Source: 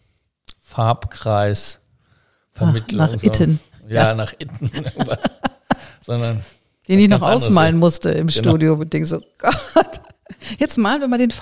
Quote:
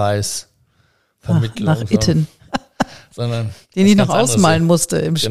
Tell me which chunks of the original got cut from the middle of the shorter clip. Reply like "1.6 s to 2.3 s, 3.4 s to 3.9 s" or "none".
3.8 s to 5.4 s, 6.5 s to 6.8 s